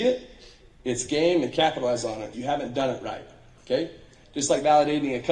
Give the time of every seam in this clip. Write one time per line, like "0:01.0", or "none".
0:02.3